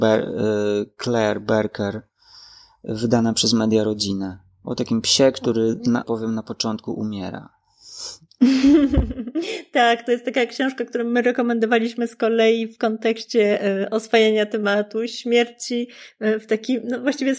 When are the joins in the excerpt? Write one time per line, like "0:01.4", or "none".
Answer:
0:06.0